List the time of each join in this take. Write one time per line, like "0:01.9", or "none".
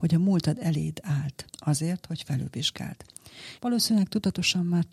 0:01.5
0:03.6

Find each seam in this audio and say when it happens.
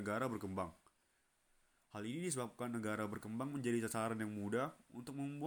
none

